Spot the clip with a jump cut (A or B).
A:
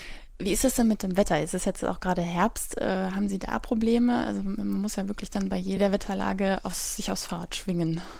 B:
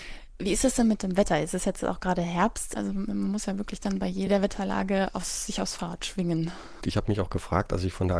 B